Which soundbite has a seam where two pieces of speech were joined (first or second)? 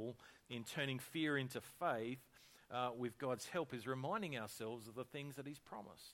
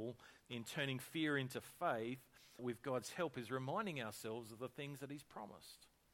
second